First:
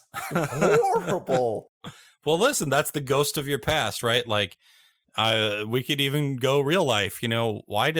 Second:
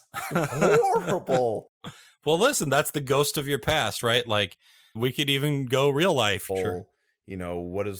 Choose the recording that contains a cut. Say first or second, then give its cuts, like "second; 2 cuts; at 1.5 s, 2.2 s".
second; 2 cuts; at 4.9 s, 6.5 s